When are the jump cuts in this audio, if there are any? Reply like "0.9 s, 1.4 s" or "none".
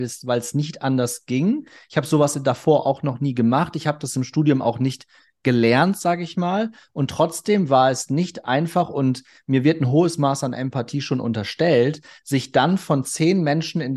none